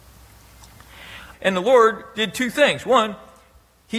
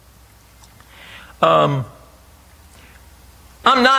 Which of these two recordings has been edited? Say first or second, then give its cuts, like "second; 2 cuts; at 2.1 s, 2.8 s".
first; 1 cut; at 1.3 s